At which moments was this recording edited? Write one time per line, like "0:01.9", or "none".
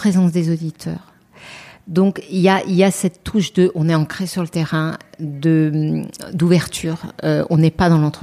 none